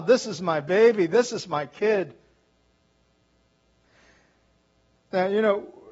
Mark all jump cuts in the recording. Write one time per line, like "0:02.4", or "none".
none